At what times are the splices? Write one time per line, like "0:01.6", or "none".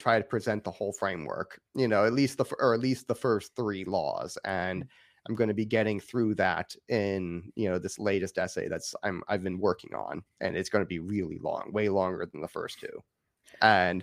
none